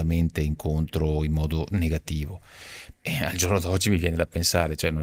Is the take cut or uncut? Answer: cut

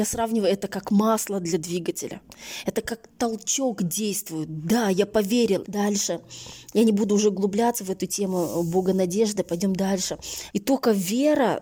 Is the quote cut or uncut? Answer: cut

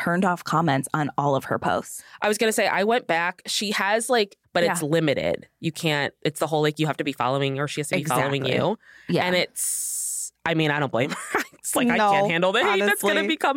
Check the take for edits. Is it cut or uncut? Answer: cut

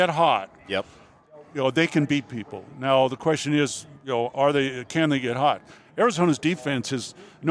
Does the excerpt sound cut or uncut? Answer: uncut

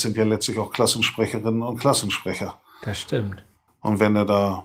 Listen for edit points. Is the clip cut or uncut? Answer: cut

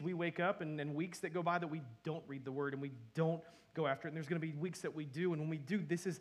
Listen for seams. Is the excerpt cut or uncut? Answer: uncut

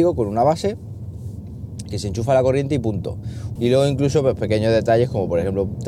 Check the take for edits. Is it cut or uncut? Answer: cut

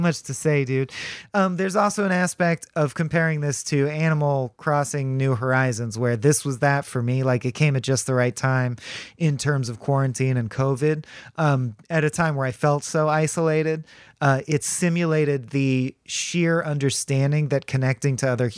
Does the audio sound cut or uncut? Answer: uncut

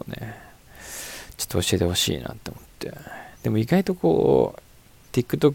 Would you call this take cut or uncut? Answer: uncut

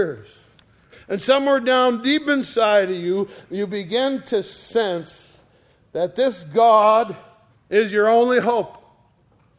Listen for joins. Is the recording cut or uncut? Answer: cut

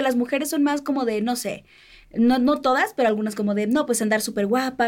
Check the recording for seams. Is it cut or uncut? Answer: uncut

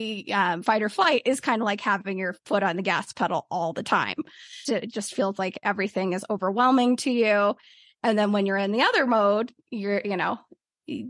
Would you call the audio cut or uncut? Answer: cut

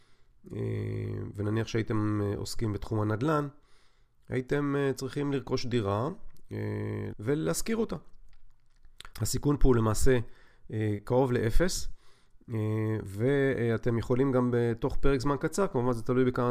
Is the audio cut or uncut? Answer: cut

